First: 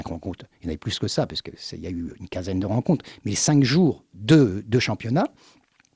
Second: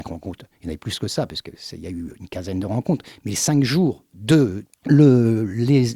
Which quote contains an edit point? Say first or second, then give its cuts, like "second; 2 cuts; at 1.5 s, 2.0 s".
second; 1 cut; at 4.6 s